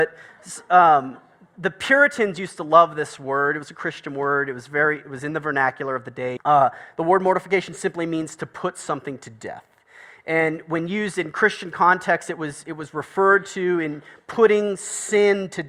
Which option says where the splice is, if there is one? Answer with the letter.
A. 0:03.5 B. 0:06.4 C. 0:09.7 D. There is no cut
B